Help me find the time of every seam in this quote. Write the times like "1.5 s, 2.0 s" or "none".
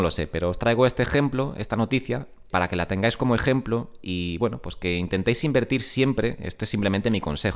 2.5 s